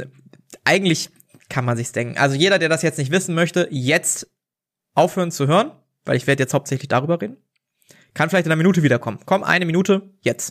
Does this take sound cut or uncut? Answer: uncut